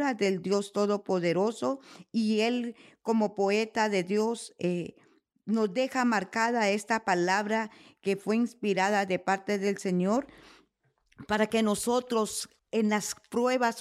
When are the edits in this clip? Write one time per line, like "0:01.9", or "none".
0:12.6

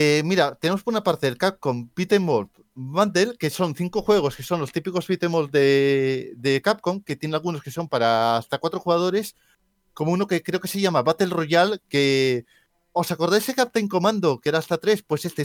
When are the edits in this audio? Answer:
none

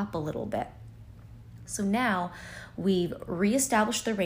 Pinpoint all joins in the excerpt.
none

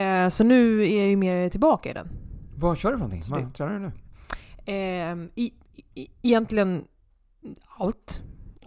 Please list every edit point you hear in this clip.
none

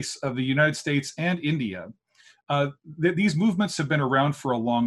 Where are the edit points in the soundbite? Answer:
none

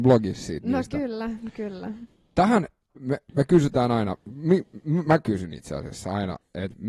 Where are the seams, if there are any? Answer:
none

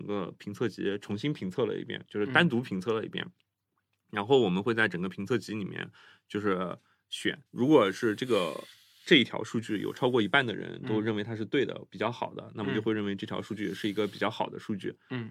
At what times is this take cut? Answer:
0:07.5

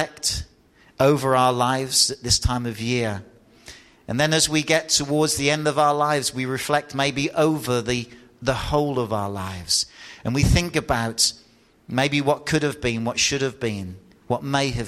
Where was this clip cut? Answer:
none

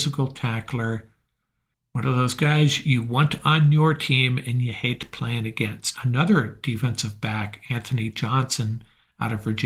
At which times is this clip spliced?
0:05.9

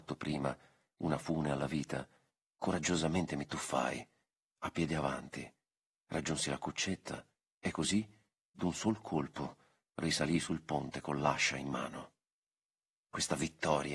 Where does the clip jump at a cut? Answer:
none

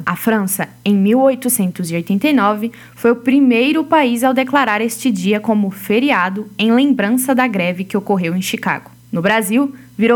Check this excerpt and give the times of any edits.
none

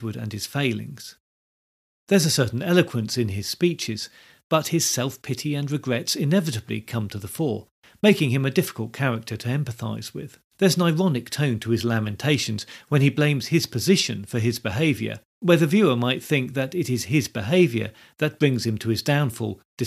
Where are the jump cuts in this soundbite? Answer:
0:10.5
0:15.3

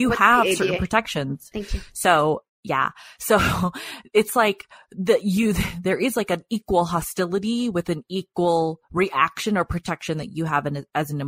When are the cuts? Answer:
0:01.5

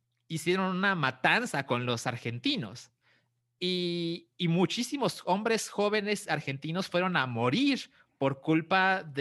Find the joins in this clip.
none

